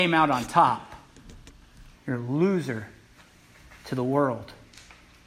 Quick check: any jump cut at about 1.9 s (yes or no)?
yes